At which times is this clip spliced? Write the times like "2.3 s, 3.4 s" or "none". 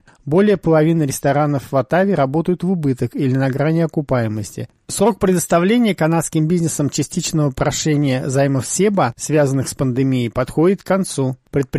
4.7 s

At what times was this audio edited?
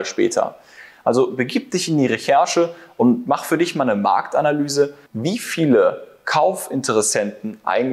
0.9 s, 5.1 s

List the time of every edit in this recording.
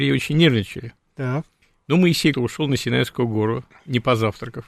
2.3 s

